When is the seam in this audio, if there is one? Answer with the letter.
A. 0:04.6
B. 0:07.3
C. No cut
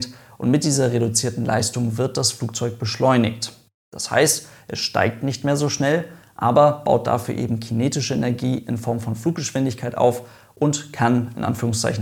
C